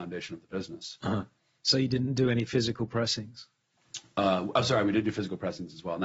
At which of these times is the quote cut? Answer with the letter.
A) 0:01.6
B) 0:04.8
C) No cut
A